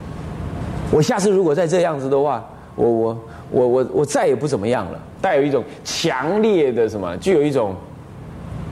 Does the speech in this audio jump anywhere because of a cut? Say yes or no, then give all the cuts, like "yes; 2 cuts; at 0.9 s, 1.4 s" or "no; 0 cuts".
yes; 2 cuts; at 5.2 s, 7.2 s